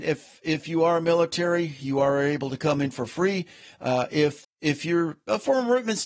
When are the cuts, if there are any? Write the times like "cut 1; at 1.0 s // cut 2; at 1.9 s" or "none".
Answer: cut 1; at 4.4 s